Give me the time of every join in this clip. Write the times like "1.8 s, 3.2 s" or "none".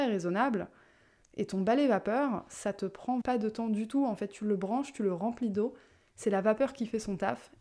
3.2 s